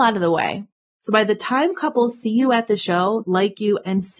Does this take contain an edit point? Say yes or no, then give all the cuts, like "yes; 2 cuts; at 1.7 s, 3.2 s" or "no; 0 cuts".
yes; 2 cuts; at 0.9 s, 3.2 s